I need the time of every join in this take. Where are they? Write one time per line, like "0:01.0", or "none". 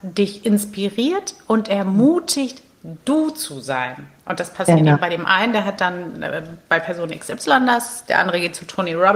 none